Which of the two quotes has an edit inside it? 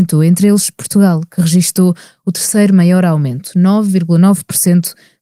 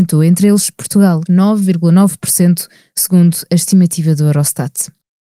second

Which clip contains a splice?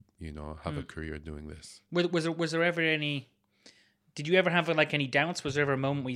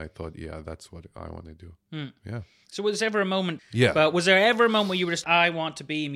second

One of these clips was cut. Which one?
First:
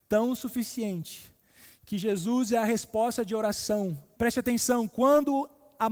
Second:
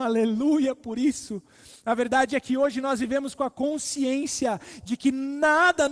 first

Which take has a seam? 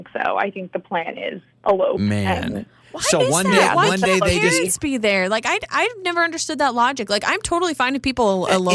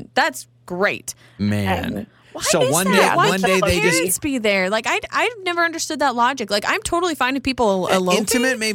second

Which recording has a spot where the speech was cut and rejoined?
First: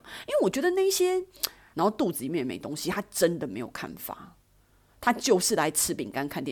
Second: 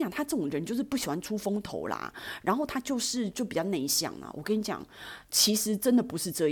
first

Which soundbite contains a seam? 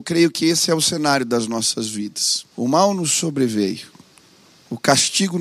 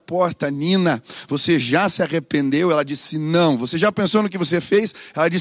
first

